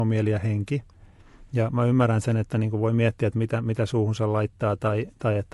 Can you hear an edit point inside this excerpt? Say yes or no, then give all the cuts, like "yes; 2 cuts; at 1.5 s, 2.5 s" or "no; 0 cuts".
no; 0 cuts